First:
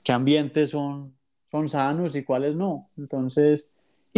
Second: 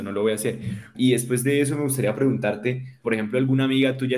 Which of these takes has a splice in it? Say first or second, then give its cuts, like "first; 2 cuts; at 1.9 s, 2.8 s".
second; 2 cuts; at 0.9 s, 3.0 s